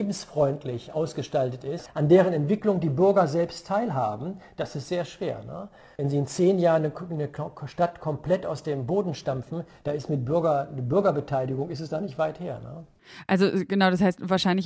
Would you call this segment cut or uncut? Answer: uncut